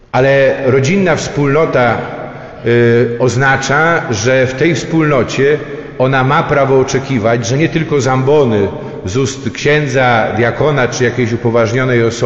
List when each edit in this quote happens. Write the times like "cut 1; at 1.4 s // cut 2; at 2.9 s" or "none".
none